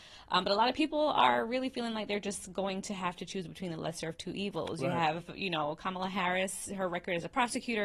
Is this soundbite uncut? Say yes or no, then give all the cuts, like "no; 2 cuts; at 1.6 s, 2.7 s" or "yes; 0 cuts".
yes; 0 cuts